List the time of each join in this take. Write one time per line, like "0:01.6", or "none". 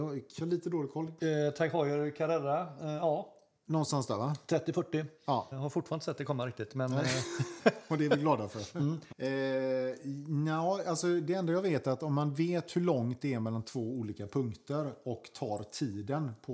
0:01.2
0:05.5
0:09.1